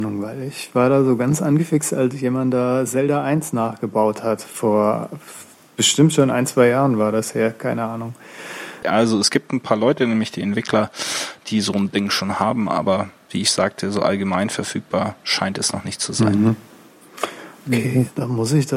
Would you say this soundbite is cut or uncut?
cut